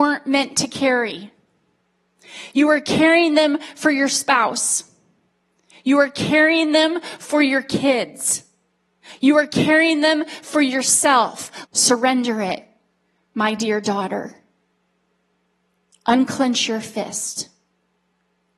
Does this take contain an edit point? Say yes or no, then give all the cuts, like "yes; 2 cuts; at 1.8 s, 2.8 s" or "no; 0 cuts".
yes; 1 cut; at 11.6 s